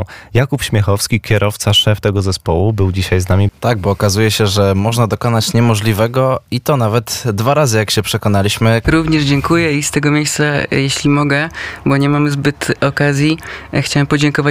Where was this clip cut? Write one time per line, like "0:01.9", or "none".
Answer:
0:03.5
0:08.8